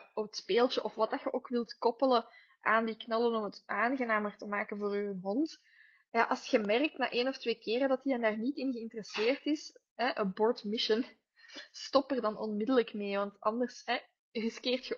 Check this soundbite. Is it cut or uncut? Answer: uncut